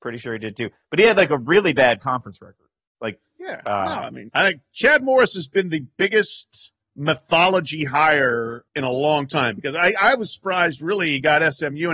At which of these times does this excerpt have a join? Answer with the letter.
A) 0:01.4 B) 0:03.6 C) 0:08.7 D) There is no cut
C